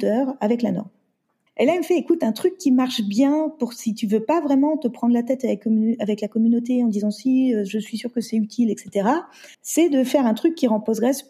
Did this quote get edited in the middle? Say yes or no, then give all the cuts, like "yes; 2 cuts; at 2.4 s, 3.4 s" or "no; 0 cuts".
yes; 2 cuts; at 1.5 s, 9.5 s